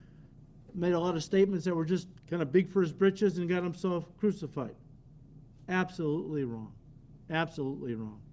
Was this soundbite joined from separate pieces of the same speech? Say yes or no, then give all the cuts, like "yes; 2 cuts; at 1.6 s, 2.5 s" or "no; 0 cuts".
yes; 1 cut; at 2.2 s